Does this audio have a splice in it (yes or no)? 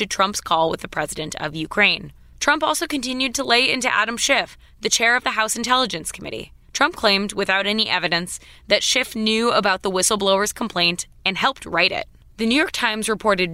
no